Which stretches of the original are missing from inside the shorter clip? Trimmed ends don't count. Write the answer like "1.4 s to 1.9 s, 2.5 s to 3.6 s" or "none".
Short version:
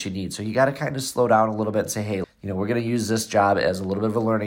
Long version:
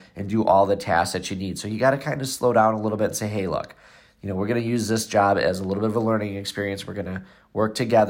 3.5 s to 4.0 s